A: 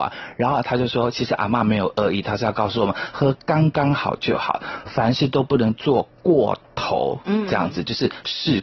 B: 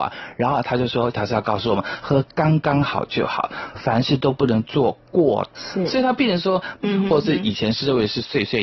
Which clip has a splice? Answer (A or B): B